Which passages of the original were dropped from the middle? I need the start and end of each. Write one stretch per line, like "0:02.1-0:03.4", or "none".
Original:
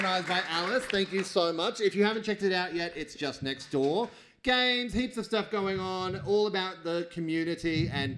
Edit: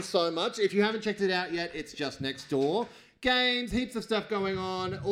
none